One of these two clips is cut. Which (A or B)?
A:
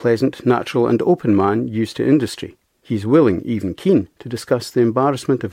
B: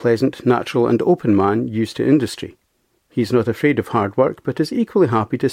A